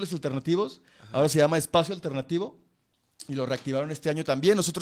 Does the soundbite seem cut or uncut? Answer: uncut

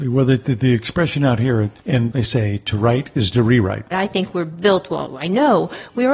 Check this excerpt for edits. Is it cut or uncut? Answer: cut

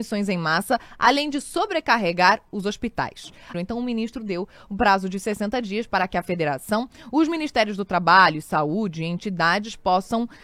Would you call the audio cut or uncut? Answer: cut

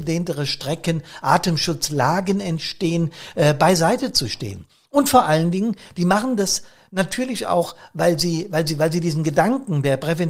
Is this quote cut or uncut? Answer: uncut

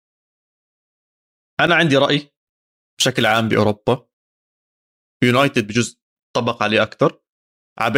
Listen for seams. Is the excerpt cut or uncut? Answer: uncut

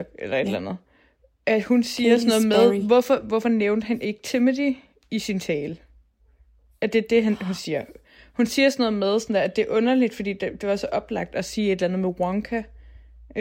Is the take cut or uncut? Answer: uncut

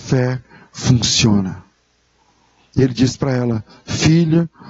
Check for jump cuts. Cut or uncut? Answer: uncut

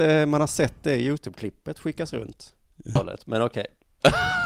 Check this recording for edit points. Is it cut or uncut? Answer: cut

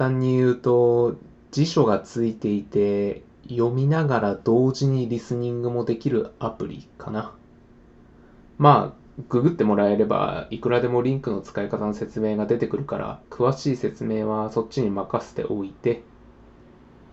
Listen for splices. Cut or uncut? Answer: cut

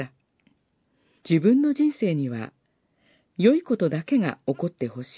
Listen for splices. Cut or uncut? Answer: cut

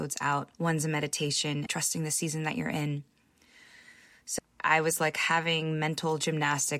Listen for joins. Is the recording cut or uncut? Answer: cut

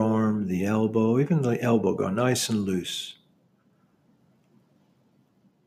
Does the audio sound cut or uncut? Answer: uncut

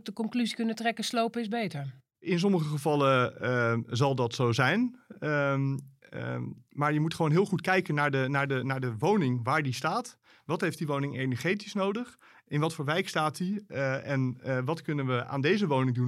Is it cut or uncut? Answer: uncut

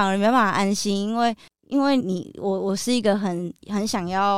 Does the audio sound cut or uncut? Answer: cut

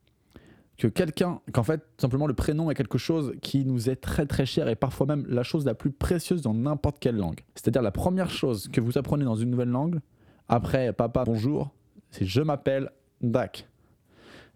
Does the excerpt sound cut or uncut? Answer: cut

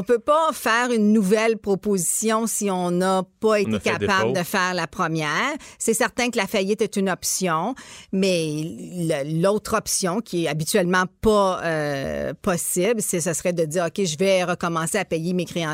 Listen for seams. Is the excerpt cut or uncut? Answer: uncut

